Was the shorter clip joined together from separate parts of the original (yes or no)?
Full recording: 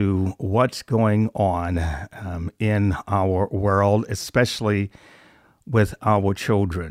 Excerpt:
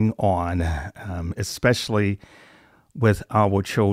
yes